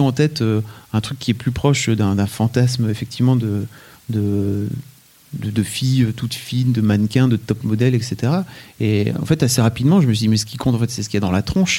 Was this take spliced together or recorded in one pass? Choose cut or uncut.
uncut